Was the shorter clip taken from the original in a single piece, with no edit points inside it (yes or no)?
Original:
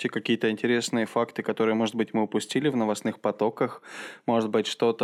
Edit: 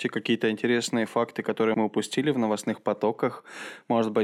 no